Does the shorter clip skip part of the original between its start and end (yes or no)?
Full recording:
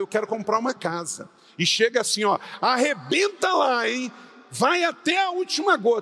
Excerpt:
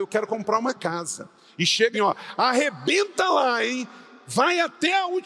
yes